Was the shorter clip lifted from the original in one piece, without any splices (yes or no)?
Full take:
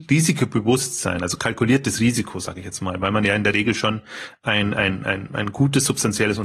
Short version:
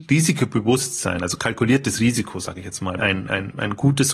no